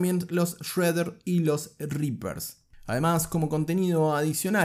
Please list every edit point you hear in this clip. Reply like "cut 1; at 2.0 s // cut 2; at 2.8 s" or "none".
none